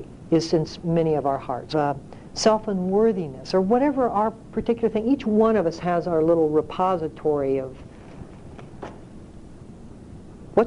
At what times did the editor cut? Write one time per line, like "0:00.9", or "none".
0:01.7